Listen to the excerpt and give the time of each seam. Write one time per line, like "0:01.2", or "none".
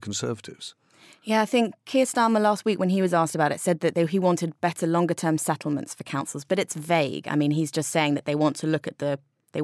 none